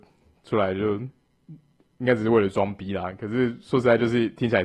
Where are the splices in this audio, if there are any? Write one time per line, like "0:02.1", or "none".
none